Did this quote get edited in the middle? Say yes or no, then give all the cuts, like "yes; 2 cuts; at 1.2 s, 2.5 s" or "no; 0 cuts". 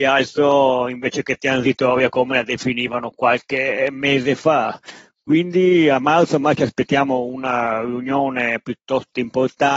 no; 0 cuts